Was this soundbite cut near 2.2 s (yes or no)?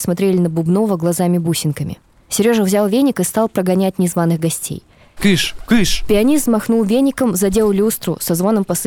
no